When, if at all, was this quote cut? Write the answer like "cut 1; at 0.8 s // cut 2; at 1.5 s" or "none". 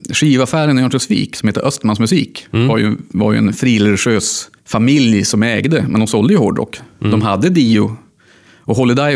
cut 1; at 4.6 s